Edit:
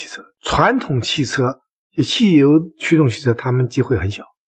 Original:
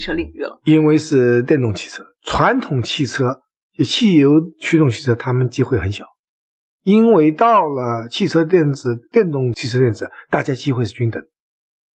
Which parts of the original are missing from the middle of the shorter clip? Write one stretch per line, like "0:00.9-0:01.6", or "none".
none